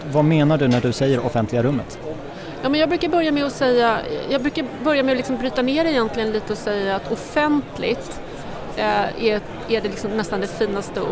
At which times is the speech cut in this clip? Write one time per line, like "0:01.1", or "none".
none

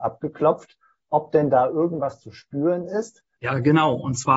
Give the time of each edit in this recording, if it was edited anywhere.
0:03.3

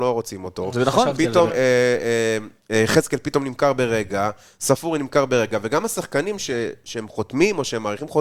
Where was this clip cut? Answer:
0:01.5

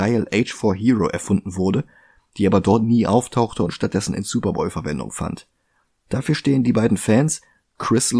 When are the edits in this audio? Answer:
none

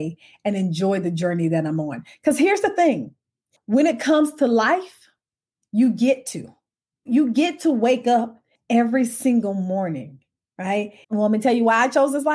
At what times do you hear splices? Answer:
0:11.0

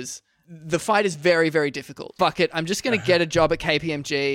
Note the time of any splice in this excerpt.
0:02.2

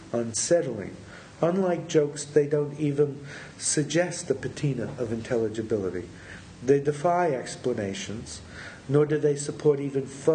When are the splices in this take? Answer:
none

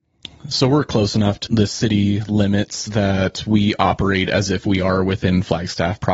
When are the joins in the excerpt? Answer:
0:01.5

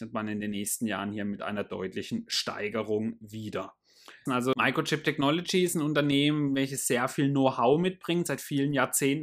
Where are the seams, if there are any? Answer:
0:04.3

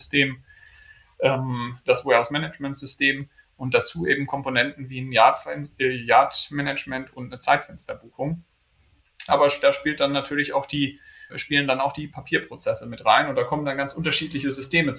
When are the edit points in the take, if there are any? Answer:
0:09.3
0:11.3

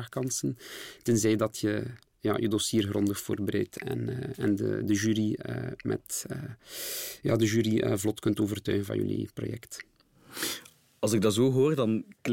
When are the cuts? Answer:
none

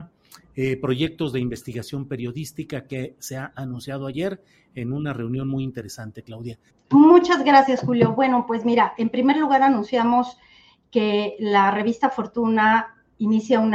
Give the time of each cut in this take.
0:06.7

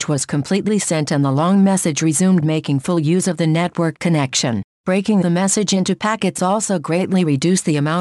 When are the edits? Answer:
none

